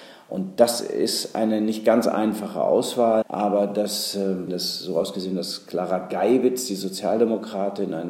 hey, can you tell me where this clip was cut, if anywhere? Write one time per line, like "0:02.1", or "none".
0:03.2
0:04.5